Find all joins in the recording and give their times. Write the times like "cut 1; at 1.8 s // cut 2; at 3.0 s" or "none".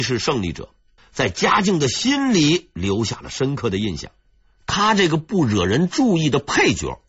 cut 1; at 1.0 s